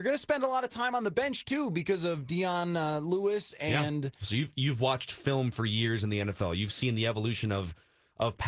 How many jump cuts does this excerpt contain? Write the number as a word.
one